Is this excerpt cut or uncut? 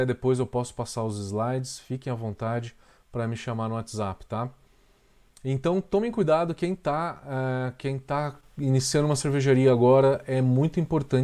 uncut